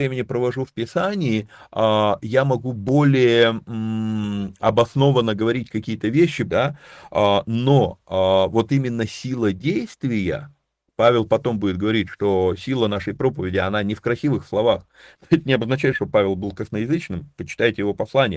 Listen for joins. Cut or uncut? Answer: cut